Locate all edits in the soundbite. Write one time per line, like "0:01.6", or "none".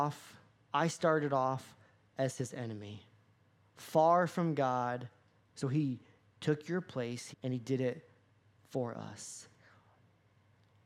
0:05.4
0:07.3